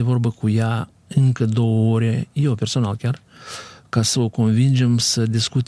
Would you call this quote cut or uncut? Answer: uncut